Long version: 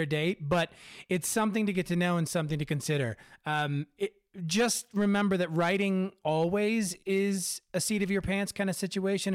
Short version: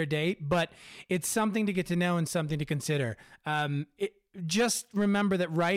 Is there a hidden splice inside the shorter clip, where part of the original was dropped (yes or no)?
no